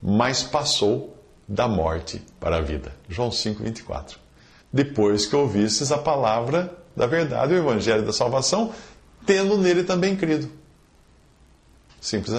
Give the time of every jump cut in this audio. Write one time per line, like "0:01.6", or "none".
0:04.6